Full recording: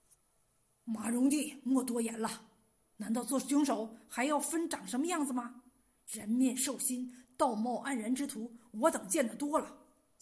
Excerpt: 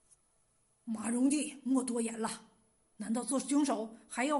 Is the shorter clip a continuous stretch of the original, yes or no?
yes